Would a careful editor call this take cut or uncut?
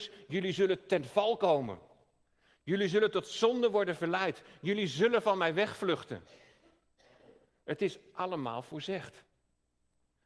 uncut